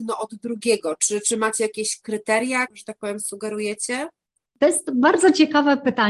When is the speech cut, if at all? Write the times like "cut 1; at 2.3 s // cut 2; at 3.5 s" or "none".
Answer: cut 1; at 2.7 s